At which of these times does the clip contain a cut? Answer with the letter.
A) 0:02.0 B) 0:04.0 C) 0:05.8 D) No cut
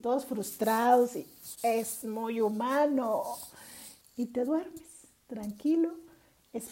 B